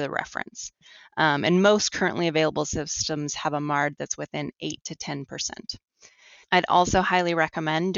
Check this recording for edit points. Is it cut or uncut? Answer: cut